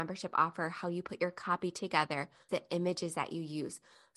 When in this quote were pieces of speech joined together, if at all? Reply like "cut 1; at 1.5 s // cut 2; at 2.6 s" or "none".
cut 1; at 2.5 s